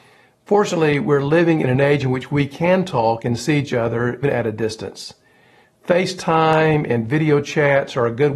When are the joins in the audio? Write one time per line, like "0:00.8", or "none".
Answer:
0:04.2

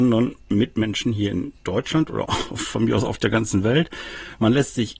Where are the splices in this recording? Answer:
0:02.3

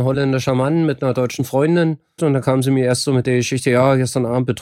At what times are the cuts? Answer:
0:02.2

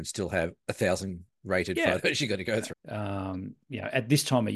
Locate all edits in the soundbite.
0:02.7

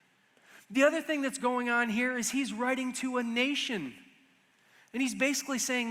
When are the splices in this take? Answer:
none

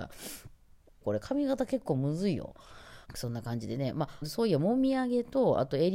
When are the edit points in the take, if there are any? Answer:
0:01.0
0:03.0
0:04.2

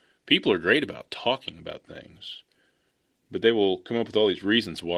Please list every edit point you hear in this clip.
0:03.2

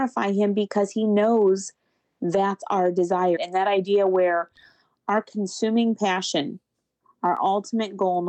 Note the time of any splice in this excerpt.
0:03.4

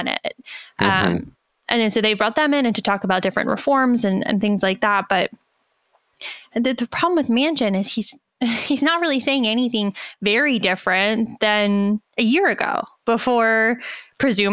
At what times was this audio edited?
none

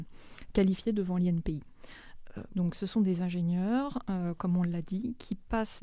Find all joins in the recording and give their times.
0:02.5

